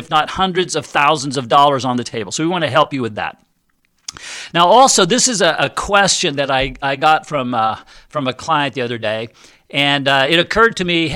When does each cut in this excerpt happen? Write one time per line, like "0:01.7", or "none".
none

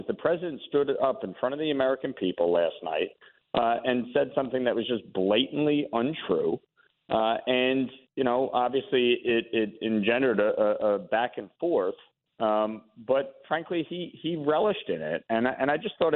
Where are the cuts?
none

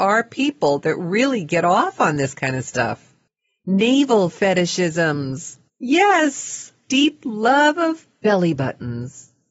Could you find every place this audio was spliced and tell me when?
0:06.8

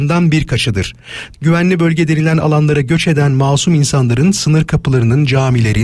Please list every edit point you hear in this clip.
0:01.3

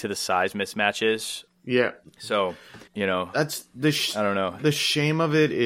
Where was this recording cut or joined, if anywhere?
0:01.5
0:02.9

